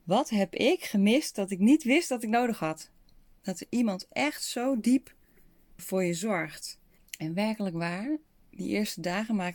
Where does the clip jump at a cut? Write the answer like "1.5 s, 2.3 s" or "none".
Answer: 5.8 s, 7.0 s

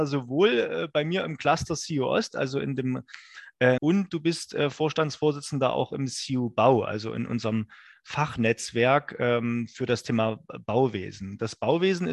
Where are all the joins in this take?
3.8 s

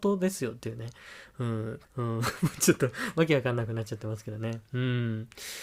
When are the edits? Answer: 1.8 s

